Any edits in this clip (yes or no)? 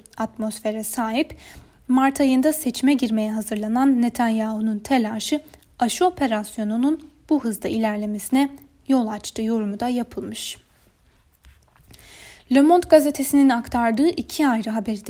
no